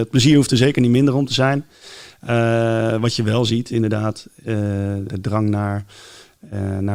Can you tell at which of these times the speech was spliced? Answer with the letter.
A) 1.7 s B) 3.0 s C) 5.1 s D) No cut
C